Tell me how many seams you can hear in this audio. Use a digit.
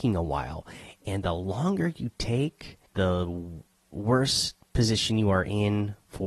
1